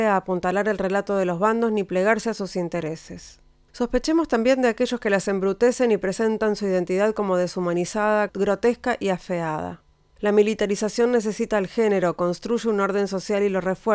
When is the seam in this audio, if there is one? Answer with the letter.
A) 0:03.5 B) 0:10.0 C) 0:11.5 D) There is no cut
D